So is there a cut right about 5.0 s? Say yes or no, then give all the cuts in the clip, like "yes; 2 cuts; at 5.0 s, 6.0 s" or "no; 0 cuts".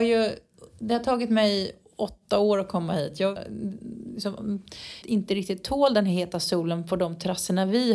yes; 2 cuts; at 3.4 s, 5.0 s